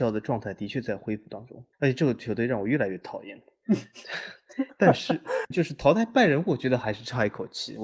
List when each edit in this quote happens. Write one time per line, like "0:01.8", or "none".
0:01.7
0:05.5